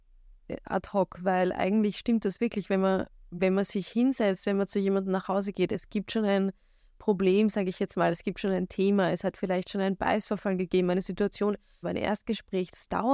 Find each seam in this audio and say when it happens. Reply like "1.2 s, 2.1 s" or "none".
11.8 s